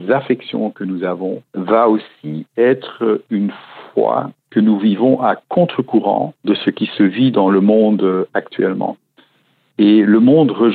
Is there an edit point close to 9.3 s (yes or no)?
no